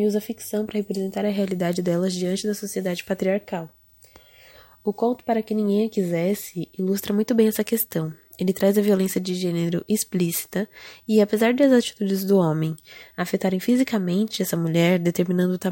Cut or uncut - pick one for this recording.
uncut